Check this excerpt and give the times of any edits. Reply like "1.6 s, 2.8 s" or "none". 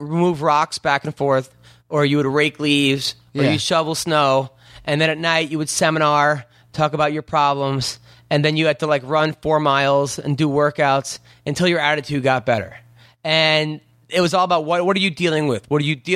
none

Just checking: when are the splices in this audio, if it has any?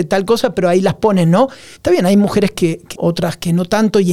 1.8 s, 2.9 s

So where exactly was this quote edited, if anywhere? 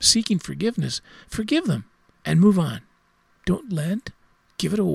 3.3 s

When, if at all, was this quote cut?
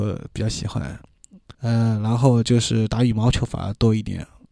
1.5 s

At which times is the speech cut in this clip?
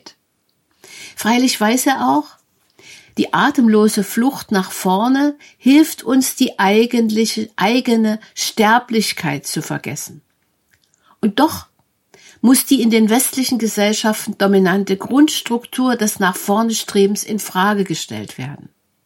none

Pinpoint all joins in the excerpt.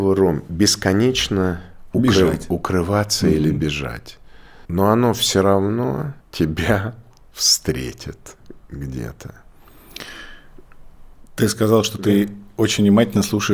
4.7 s, 6.2 s

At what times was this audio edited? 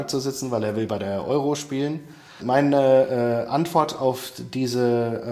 2.4 s

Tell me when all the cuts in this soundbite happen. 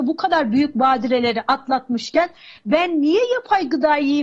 none

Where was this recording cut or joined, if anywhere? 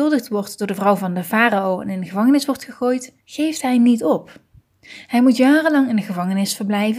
3.2 s

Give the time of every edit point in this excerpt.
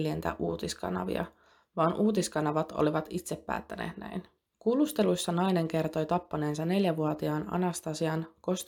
none

